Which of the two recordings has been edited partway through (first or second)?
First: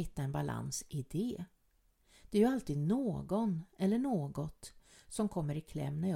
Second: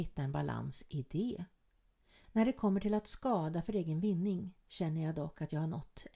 second